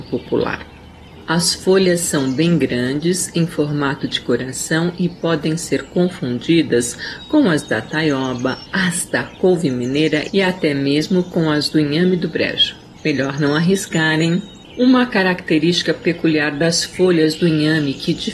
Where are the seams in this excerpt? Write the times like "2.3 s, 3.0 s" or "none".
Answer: 8.7 s, 13.0 s, 14.6 s